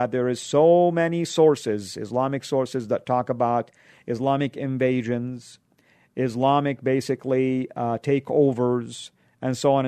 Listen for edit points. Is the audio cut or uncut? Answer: uncut